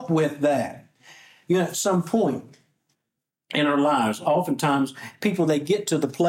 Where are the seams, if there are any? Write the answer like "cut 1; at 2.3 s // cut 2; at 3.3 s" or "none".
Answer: none